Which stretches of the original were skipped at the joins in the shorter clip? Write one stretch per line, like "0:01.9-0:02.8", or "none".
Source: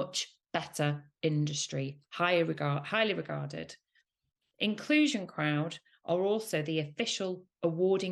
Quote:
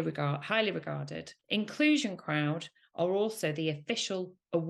0:03.8-0:04.5